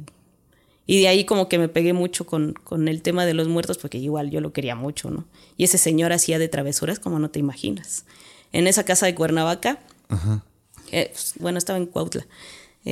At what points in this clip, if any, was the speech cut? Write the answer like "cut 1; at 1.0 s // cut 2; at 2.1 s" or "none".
cut 1; at 11.4 s

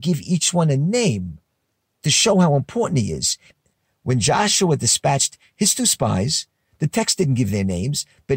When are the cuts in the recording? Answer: none

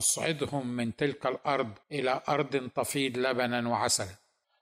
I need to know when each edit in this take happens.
cut 1; at 1.8 s

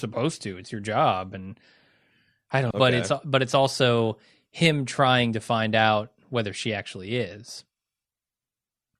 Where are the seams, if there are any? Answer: cut 1; at 2.7 s

